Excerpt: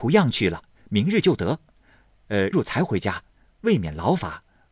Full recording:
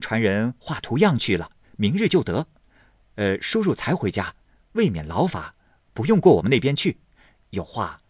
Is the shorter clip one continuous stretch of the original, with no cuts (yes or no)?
no